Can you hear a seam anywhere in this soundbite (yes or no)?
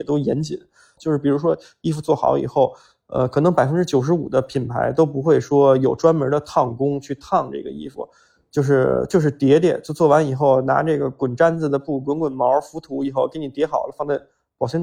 yes